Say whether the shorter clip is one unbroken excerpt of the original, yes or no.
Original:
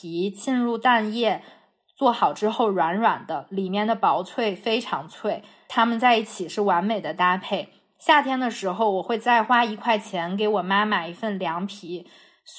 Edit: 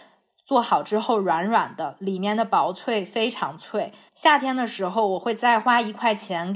no